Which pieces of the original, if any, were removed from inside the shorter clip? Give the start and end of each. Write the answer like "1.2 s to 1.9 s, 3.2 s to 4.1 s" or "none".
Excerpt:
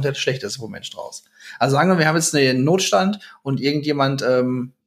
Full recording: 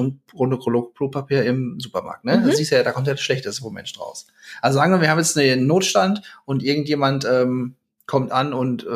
none